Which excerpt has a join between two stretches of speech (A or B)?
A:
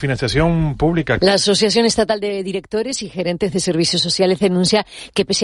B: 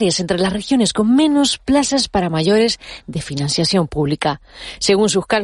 A